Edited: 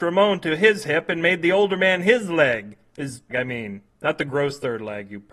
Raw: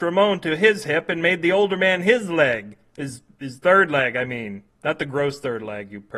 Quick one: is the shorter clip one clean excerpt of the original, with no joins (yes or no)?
no